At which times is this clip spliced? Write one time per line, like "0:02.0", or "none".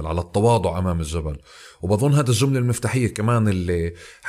none